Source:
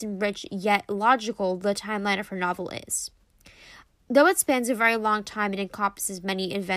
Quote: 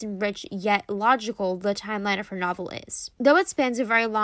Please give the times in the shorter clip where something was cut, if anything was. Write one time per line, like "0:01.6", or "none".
0:03.1

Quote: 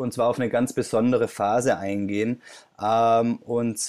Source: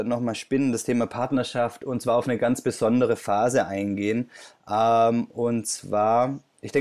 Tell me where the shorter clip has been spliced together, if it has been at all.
none

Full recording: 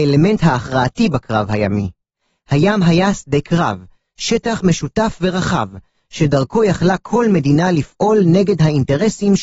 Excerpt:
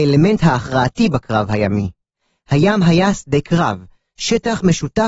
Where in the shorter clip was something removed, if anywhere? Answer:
none

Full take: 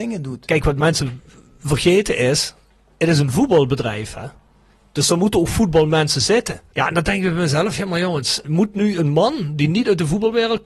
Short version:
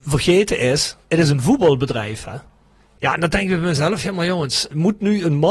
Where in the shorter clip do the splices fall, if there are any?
0:01.0
0:03.0

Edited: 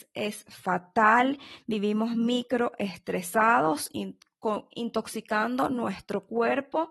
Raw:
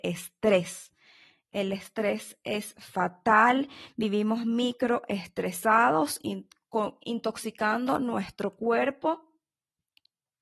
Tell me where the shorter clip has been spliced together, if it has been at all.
none

